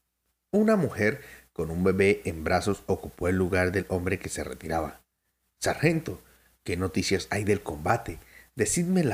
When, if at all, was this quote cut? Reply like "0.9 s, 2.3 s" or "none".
none